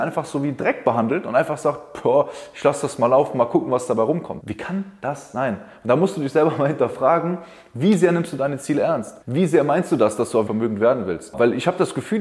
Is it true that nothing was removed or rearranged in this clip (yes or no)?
no